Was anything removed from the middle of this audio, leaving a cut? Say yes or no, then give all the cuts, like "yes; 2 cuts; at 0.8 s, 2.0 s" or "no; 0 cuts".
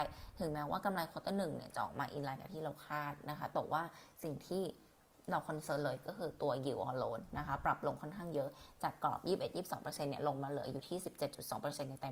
no; 0 cuts